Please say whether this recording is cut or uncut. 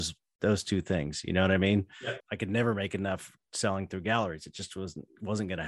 cut